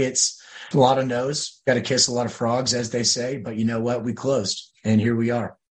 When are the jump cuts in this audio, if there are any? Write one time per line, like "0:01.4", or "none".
none